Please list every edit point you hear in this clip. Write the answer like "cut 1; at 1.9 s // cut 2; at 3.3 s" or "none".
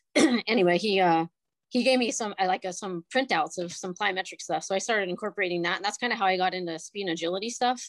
none